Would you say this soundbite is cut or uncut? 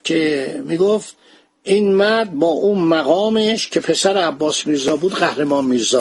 uncut